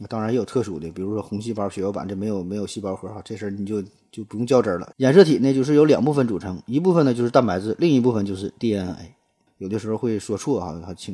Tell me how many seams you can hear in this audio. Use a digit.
2